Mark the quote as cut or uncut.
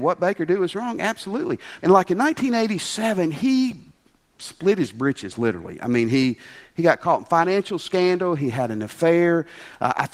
cut